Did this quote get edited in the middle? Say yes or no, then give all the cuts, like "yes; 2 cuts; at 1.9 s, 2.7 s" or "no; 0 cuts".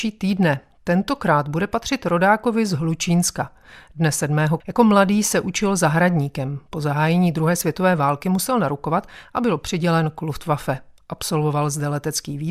yes; 1 cut; at 4.6 s